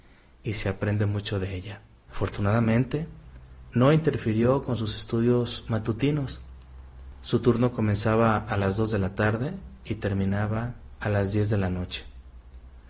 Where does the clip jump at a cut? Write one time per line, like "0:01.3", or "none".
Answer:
0:02.1